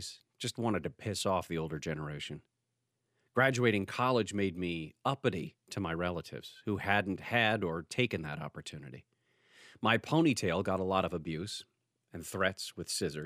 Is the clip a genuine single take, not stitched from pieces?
yes; 0 cuts

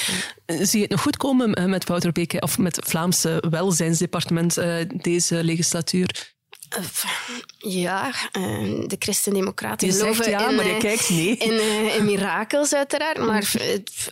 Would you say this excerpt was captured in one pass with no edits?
yes; 0 cuts

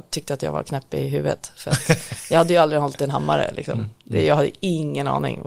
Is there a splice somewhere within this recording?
no; 0 cuts

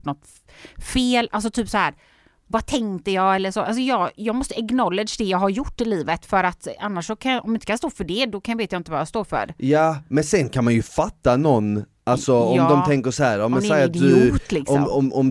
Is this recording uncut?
yes; 0 cuts

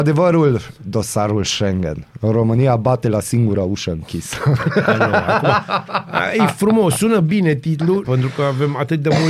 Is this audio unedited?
no; 1 cut; at 8.0 s

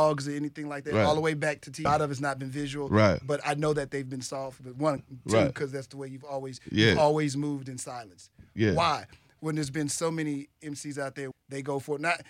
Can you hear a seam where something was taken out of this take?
yes; 3 cuts; at 1.9 s, 5.0 s, 11.3 s

